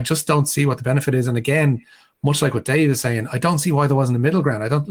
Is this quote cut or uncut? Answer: uncut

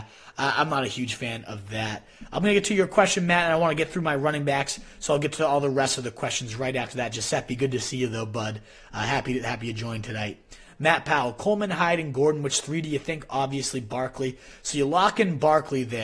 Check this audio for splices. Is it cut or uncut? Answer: uncut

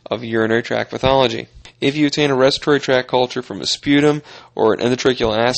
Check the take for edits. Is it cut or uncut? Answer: uncut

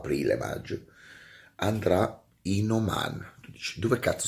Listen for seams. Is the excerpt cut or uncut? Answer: uncut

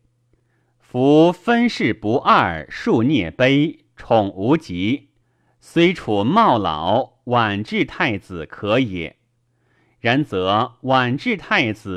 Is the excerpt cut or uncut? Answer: uncut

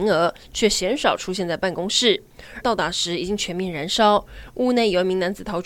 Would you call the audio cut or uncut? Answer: cut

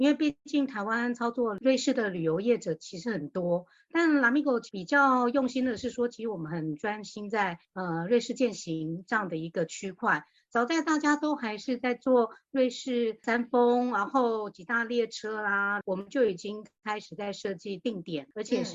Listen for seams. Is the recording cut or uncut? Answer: cut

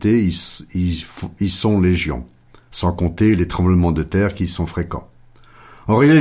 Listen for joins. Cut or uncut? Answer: uncut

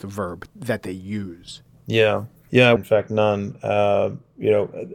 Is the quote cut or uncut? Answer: cut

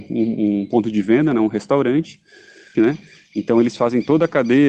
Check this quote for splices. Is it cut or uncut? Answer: cut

